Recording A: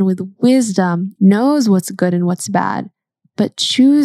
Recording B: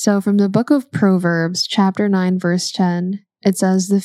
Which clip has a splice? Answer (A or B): A